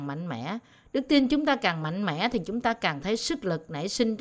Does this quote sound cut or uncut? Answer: uncut